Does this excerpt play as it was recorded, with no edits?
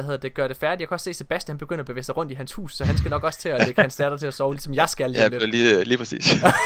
yes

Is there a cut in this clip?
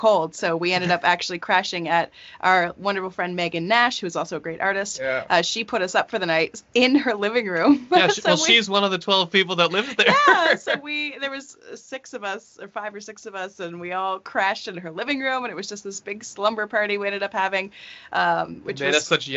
no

